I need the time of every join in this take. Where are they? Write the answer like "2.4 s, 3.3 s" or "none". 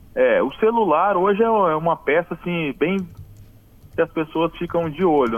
none